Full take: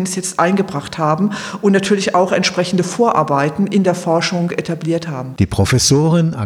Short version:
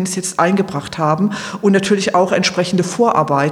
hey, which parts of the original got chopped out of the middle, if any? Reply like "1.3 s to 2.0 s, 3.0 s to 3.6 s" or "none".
none